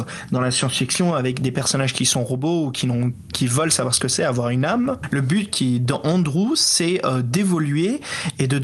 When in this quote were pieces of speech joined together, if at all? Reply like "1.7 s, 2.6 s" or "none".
none

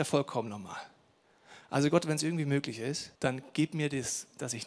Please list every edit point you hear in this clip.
3.2 s

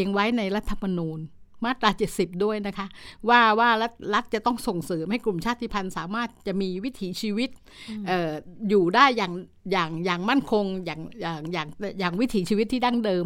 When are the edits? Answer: none

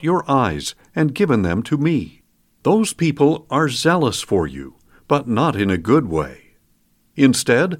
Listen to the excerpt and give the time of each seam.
2.5 s

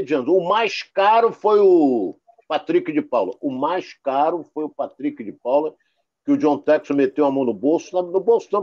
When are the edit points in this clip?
none

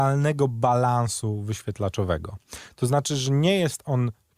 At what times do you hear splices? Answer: none

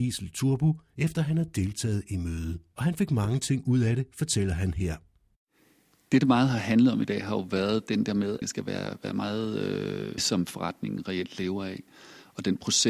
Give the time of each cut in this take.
8.4 s, 10.2 s

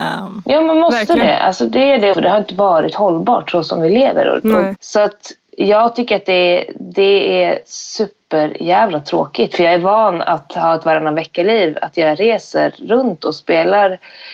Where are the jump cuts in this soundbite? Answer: 2.1 s, 4.8 s

